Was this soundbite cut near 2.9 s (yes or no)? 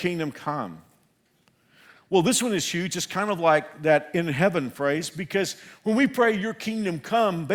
no